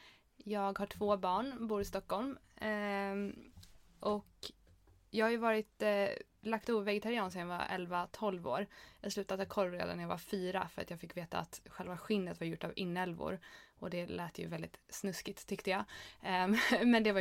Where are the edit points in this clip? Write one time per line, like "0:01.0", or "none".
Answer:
none

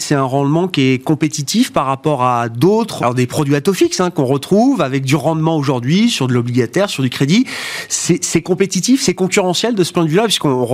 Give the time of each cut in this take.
0:03.0

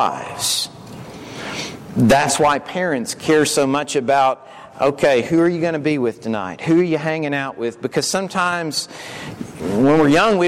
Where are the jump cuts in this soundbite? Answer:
none

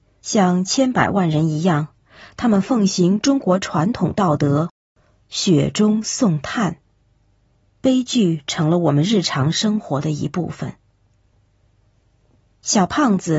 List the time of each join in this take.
0:07.6

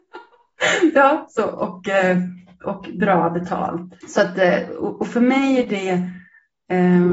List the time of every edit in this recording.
0:04.0

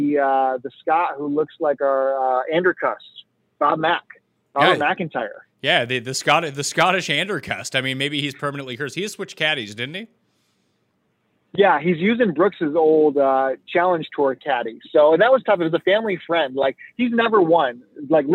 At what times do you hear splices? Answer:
none

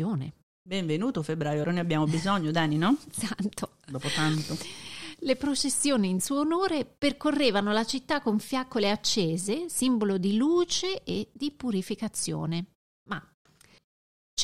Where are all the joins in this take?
0:01.6

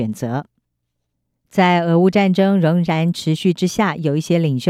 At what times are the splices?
none

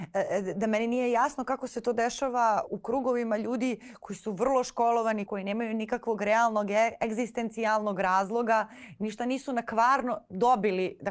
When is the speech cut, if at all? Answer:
0:02.7
0:05.3

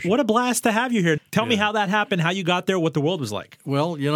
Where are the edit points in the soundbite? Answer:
0:01.2

